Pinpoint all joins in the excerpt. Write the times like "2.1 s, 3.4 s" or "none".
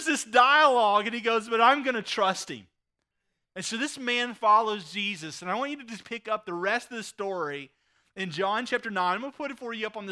none